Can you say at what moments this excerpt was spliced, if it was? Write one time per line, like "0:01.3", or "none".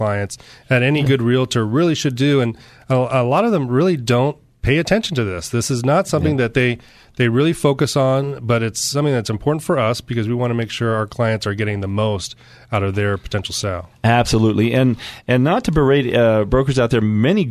none